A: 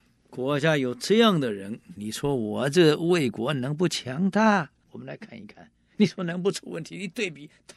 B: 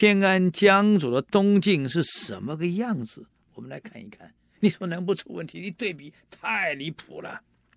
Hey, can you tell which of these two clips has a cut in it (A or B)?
A